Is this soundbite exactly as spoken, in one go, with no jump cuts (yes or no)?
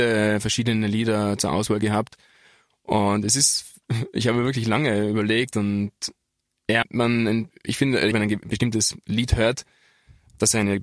no